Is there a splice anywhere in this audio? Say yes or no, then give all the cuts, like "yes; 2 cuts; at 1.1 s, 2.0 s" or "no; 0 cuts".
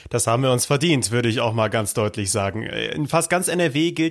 no; 0 cuts